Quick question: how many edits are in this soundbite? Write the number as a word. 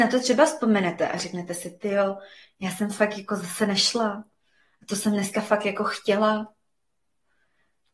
zero